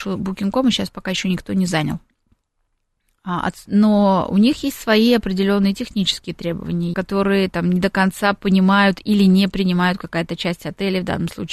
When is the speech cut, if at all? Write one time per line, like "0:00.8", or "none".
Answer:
0:03.7
0:06.9